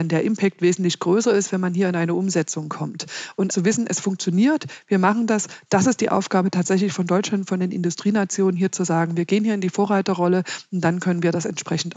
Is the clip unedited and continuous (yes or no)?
no